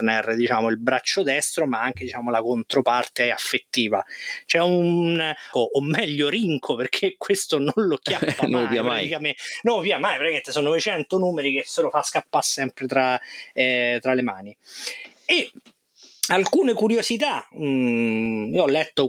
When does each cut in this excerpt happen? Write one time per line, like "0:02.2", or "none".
0:05.5